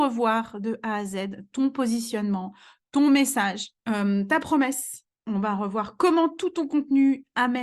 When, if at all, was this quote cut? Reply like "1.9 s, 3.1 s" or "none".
3.8 s